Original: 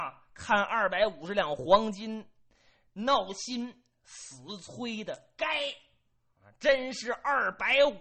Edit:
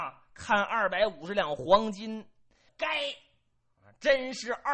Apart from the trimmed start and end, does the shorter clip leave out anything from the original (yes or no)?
yes